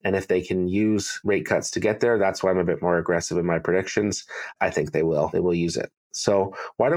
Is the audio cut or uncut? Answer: uncut